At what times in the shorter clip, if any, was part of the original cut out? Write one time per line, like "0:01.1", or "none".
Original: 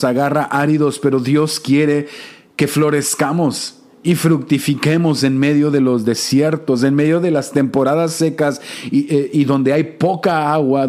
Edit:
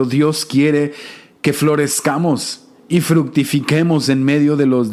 none